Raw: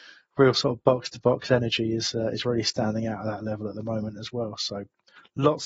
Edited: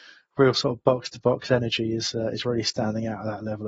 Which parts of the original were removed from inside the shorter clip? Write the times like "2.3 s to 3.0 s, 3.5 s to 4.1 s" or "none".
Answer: none